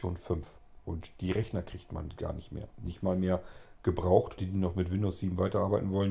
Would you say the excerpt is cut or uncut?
cut